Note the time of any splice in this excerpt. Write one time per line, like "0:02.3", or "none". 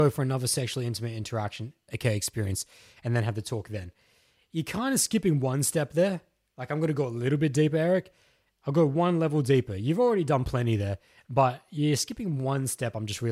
none